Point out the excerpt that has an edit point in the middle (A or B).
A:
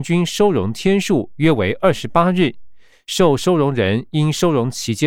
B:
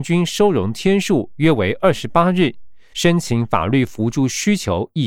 B